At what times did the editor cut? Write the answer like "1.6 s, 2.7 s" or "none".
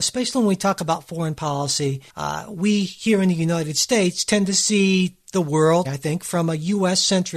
2.1 s, 5.8 s